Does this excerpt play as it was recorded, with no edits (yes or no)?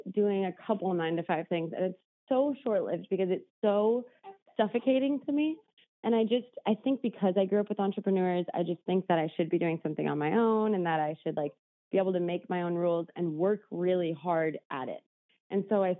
yes